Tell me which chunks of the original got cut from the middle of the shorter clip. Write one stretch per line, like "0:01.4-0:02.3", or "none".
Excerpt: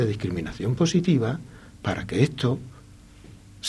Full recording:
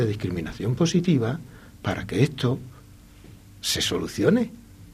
none